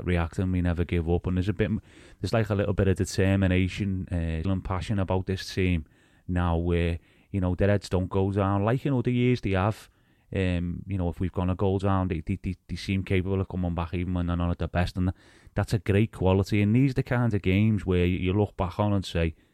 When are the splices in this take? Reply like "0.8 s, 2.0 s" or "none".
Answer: 4.4 s